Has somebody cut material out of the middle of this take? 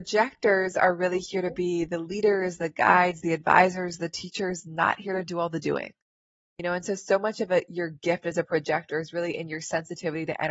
no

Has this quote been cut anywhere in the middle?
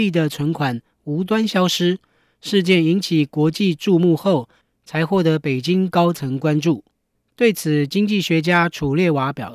no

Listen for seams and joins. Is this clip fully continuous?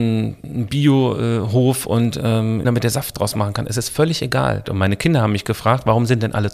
no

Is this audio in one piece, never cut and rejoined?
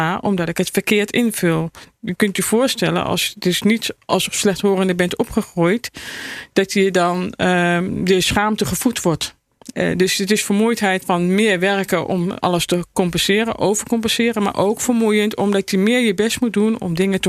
no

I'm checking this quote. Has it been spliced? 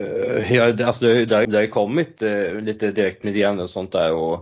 yes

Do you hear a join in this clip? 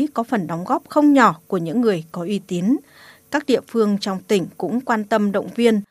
no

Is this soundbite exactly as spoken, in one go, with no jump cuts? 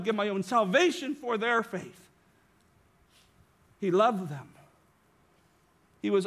yes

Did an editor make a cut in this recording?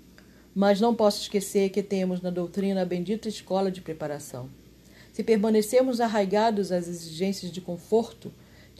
no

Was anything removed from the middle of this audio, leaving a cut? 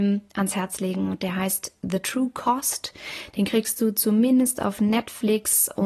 no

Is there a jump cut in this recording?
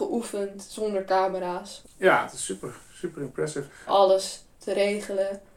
yes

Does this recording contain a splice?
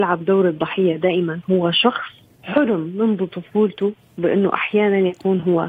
yes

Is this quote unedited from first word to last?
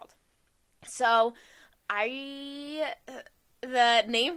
no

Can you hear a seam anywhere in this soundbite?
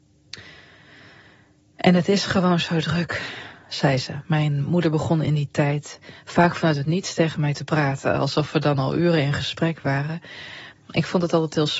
yes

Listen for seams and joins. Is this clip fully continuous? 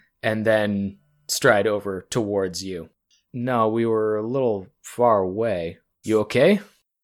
no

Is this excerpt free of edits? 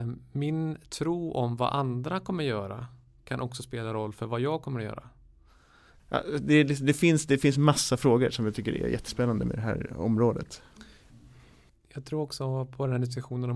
no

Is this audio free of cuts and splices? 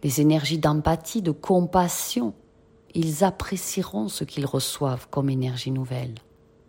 no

